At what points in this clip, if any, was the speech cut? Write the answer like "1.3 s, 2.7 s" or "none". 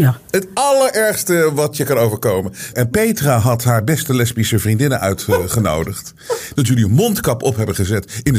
2.7 s, 6.5 s